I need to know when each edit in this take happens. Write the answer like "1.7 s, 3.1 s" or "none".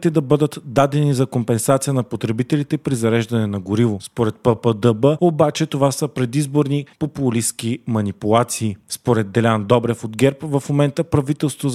none